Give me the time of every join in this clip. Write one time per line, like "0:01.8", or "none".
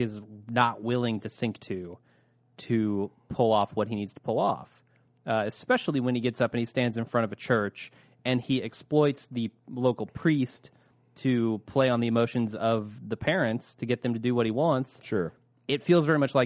none